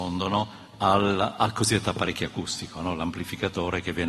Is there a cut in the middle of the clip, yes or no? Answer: no